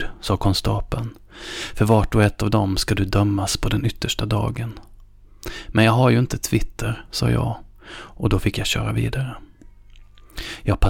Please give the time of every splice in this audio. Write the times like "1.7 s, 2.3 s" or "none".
none